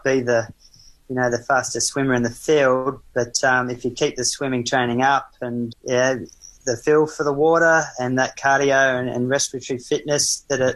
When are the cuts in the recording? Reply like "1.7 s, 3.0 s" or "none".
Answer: 5.7 s